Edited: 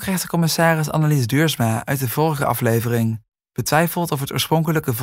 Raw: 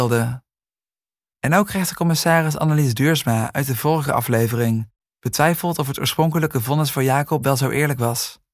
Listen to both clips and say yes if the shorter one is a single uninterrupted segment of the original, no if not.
yes